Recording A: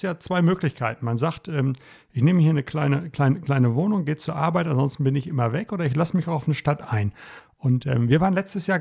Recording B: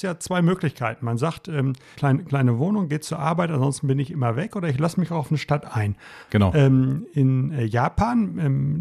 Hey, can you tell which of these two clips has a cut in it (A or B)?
B